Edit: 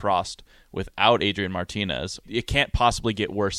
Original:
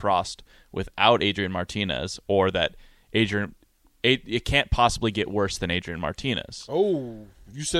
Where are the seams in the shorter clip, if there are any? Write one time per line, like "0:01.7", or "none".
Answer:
0:02.2